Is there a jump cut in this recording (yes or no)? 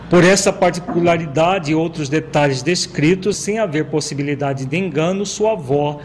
yes